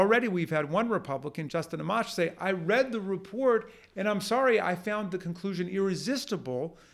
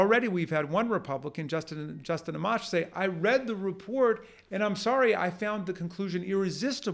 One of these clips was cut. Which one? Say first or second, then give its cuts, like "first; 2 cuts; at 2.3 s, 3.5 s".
first; 1 cut; at 1.5 s